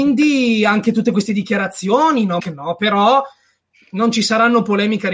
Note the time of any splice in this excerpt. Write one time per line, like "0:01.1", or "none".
0:02.4